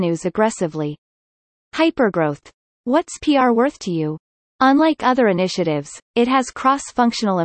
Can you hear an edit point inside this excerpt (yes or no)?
no